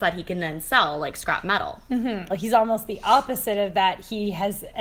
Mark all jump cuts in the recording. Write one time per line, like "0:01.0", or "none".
0:02.3